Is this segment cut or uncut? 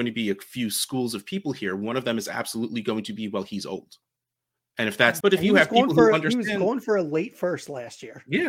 cut